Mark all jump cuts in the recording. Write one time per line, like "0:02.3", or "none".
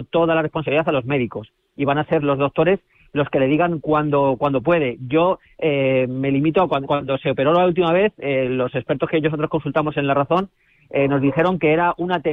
0:02.2